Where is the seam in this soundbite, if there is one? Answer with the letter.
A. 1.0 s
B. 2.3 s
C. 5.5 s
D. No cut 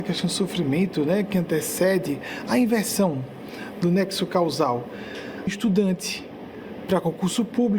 C